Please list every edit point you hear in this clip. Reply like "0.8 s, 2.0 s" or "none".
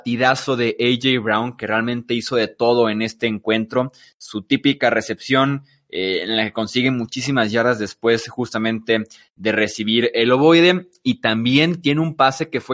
none

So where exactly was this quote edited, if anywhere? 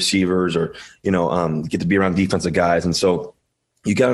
none

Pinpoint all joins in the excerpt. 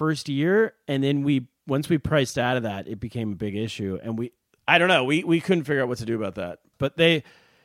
6.7 s

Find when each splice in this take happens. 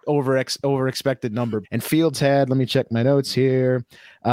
1.6 s

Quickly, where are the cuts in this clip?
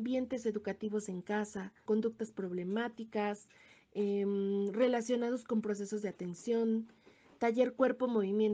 1.9 s

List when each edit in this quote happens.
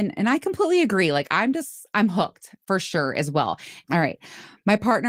3.8 s

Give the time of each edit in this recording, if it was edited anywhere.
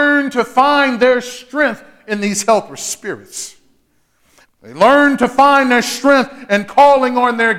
4.4 s

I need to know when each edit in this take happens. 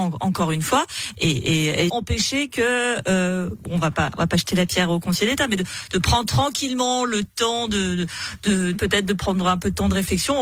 1.9 s, 8.7 s

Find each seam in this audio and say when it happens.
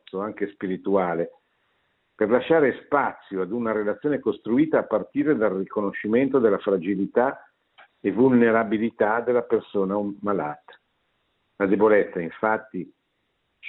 none

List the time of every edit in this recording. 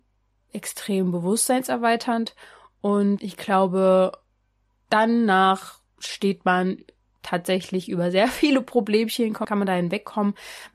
3.2 s, 9.4 s

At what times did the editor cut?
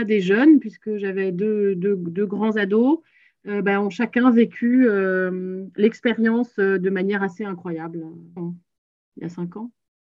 8.4 s

